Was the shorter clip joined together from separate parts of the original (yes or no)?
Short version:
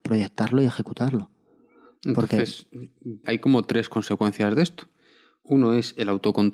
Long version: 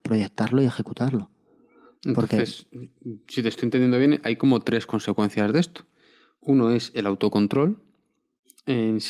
yes